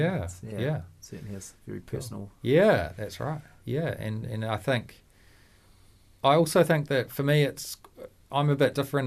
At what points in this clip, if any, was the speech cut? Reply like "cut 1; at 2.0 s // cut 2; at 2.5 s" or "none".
none